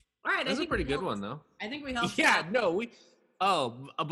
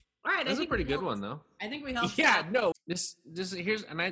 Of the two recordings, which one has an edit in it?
second; 1 cut; at 2.7 s

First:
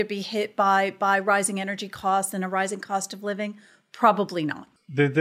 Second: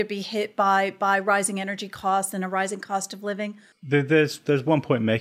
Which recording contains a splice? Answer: second; 1 cut; at 3.7 s

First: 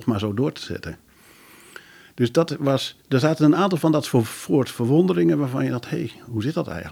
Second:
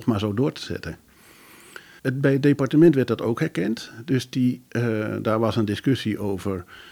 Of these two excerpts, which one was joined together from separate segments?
second; 1 cut; at 2.0 s

